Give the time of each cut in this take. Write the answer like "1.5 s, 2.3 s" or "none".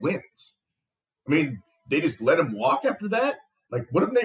none